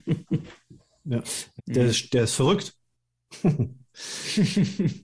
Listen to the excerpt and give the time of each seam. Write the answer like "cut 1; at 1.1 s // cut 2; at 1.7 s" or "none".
cut 1; at 1.6 s